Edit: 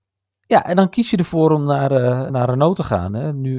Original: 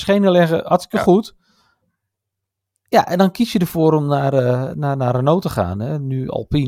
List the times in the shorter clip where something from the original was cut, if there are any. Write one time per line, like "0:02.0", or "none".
0:02.3